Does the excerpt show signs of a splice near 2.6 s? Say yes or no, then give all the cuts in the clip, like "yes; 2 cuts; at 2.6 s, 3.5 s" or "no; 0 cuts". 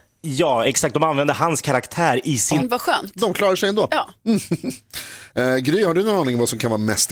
yes; 1 cut; at 2.6 s